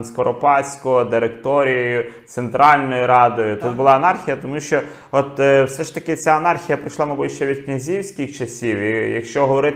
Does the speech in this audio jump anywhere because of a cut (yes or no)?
no